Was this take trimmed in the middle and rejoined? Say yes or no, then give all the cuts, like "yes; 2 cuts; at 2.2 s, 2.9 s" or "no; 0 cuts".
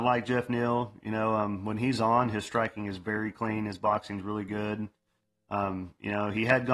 no; 0 cuts